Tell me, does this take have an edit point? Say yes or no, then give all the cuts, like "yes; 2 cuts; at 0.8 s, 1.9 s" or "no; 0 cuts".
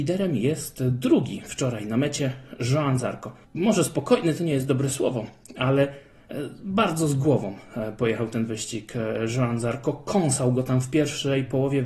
yes; 1 cut; at 3.4 s